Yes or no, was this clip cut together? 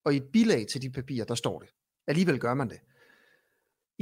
yes